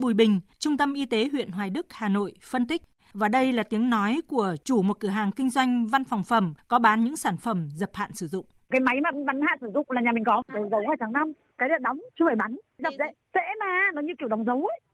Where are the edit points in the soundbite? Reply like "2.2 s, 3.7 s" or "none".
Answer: 3.0 s, 10.5 s